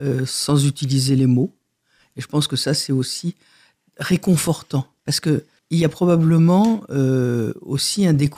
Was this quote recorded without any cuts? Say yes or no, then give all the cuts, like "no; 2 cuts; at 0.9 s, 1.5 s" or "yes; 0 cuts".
yes; 0 cuts